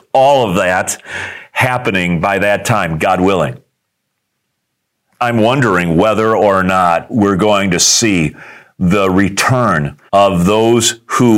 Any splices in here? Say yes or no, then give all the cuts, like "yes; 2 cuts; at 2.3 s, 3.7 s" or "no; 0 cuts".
yes; 2 cuts; at 5.0 s, 10.1 s